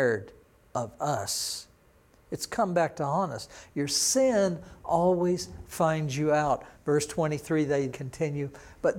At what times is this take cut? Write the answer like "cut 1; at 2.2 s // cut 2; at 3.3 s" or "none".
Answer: cut 1; at 6.7 s // cut 2; at 7.9 s